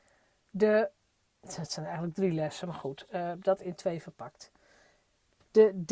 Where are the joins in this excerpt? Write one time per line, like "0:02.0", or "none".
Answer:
none